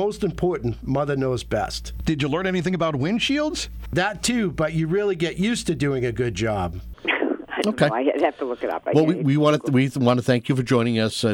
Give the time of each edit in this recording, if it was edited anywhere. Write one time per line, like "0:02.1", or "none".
0:06.9